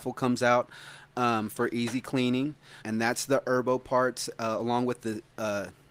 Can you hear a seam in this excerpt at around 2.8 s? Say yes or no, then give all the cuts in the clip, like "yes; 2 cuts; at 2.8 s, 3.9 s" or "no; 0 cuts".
yes; 1 cut; at 2.8 s